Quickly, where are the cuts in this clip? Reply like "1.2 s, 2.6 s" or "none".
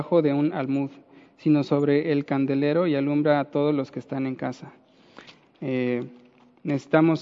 5.5 s